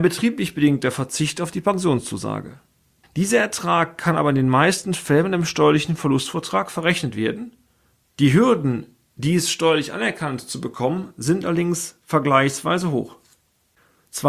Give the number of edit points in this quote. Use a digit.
2